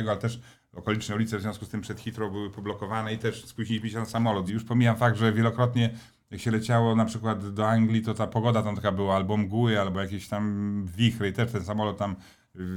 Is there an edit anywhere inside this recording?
yes; 1 cut; at 4.5 s

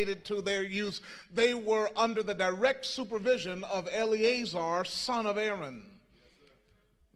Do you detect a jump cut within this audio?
no; 0 cuts

